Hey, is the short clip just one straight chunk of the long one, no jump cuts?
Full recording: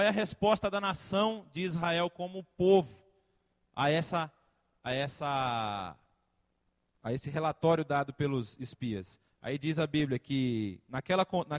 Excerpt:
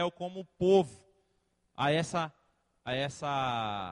yes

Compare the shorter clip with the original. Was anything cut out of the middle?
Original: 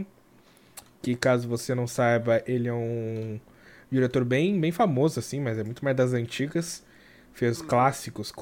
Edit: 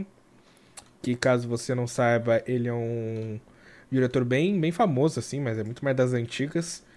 no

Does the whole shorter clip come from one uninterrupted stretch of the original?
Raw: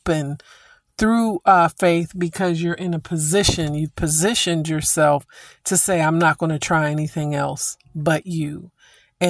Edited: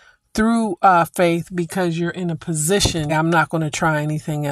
no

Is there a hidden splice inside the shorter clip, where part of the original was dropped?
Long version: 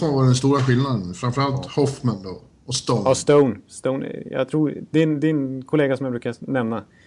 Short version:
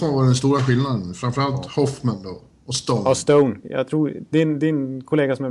yes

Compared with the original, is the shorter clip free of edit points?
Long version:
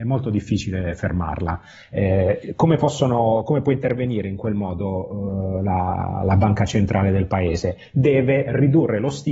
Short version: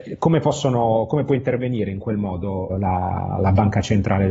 no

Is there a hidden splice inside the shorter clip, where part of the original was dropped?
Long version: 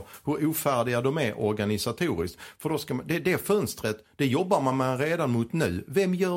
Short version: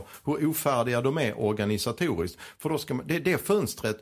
no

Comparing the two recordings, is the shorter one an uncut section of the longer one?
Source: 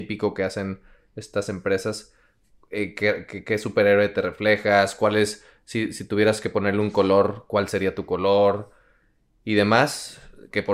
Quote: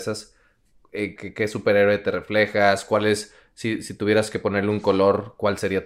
no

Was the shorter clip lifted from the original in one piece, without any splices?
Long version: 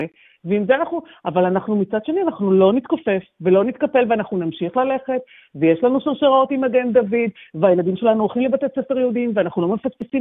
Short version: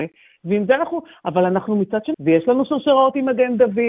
no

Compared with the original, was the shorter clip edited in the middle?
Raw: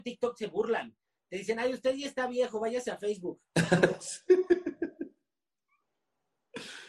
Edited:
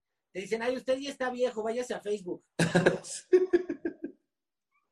no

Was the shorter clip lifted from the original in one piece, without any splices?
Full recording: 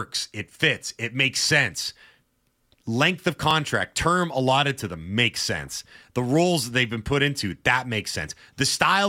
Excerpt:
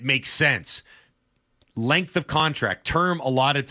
yes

